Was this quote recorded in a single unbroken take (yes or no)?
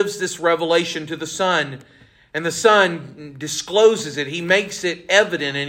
yes